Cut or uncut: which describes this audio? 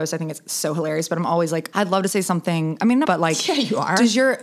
cut